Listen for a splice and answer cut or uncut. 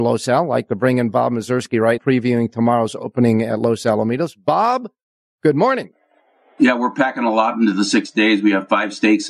cut